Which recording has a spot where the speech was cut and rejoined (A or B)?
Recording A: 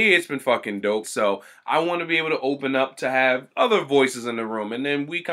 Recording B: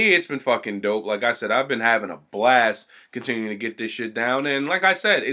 A